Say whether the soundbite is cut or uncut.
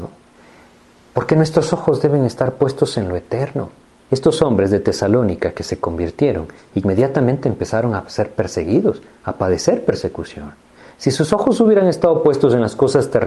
cut